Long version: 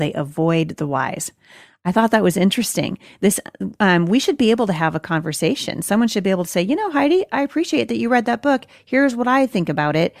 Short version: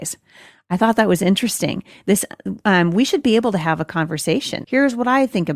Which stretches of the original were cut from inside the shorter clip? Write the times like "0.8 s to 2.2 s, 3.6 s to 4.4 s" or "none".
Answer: 5.8 s to 8.8 s